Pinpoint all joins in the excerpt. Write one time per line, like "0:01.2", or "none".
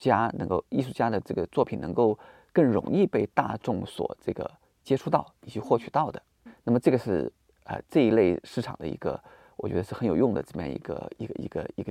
none